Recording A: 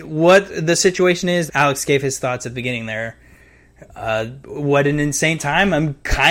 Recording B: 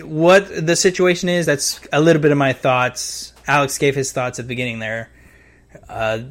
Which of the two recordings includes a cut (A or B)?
A